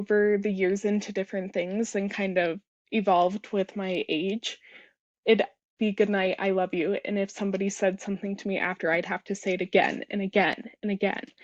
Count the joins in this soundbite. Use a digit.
1